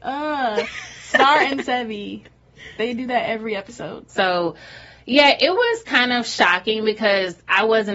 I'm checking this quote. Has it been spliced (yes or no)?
yes